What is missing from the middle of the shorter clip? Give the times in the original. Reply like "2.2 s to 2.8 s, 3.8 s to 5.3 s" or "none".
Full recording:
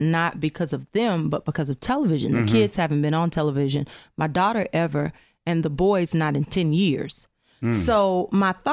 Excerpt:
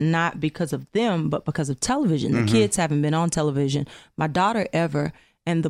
none